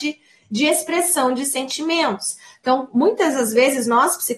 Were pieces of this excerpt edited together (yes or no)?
no